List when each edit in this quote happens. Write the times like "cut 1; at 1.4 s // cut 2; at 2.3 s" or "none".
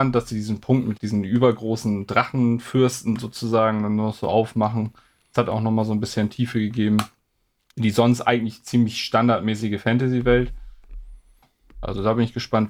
cut 1; at 1.0 s